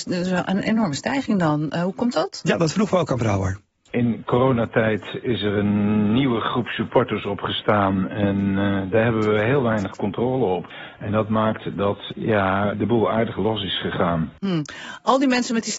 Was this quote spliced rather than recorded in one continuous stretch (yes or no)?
yes